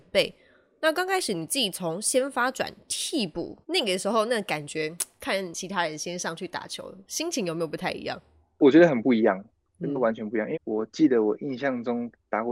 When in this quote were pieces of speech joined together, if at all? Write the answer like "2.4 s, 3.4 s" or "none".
3.6 s, 10.5 s